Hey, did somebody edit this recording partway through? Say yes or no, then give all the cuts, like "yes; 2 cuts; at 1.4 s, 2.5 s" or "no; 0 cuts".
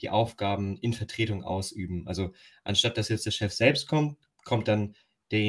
no; 0 cuts